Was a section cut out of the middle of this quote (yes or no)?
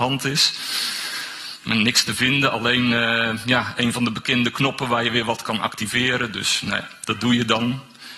no